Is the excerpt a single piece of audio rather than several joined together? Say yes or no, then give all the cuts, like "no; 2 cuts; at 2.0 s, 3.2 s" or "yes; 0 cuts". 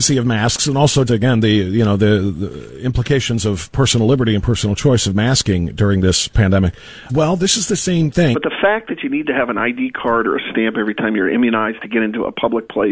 no; 3 cuts; at 1.1 s, 7.1 s, 8.3 s